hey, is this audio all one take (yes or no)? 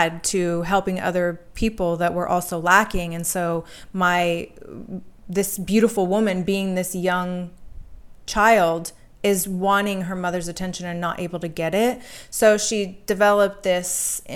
yes